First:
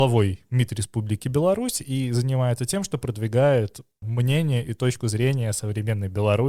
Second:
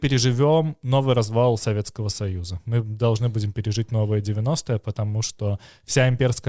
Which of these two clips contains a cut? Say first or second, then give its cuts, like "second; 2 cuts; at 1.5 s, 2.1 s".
first; 1 cut; at 4.0 s